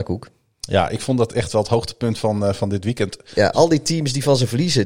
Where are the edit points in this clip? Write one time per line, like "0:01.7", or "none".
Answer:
0:03.5

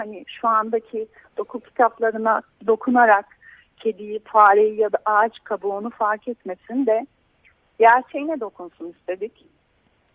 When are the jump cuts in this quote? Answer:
none

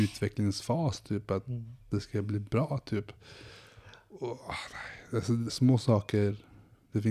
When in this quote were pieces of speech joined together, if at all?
0:05.5

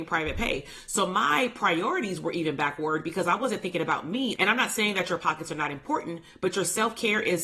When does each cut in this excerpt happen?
0:04.4

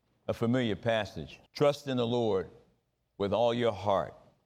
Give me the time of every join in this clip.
0:01.5

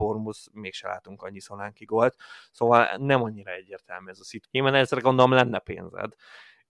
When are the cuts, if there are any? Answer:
0:04.4

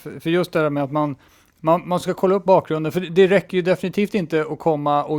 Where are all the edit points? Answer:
none

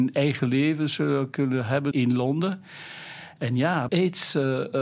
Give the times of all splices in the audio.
0:01.9
0:03.9

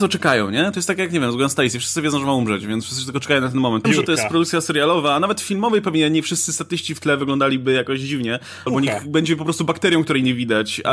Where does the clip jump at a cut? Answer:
0:03.8
0:08.7

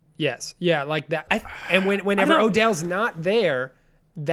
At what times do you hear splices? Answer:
0:01.3

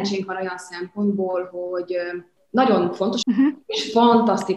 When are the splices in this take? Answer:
0:03.2

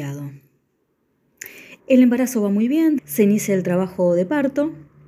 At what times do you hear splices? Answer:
0:01.8
0:03.0

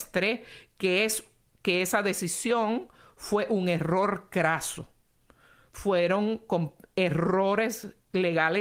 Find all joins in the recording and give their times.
0:05.7

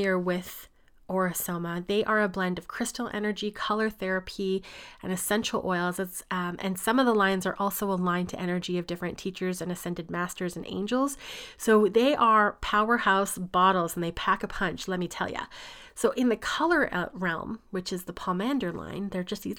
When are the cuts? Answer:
none

